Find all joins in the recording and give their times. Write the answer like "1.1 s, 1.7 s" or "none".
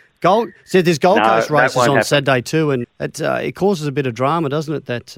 2.8 s